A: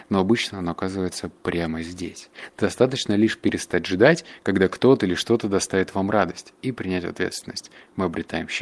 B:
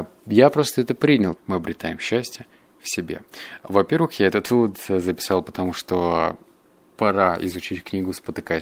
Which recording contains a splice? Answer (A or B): B